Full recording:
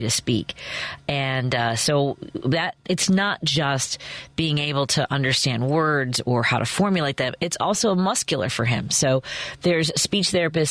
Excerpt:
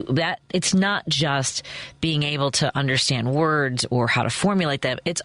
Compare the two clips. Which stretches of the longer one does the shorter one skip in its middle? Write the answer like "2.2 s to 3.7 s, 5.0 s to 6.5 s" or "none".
none